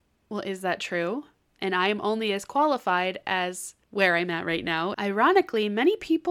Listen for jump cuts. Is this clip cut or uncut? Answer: cut